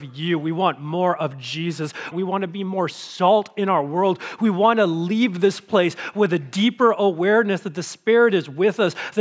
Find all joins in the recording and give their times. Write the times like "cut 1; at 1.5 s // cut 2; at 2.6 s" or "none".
cut 1; at 2.1 s